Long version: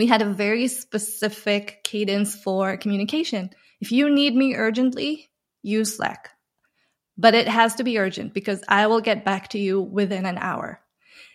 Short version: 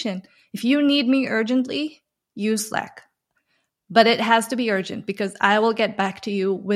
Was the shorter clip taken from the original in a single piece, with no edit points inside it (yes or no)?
yes